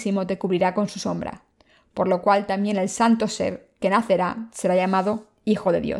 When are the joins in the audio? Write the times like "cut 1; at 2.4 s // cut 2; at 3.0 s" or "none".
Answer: none